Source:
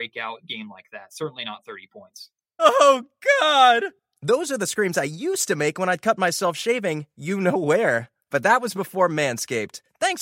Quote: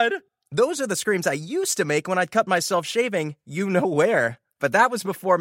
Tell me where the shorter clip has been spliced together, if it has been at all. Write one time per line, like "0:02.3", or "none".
none